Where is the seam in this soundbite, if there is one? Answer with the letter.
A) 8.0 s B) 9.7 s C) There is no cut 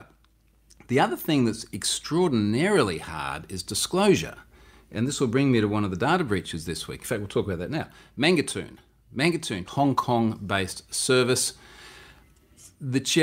B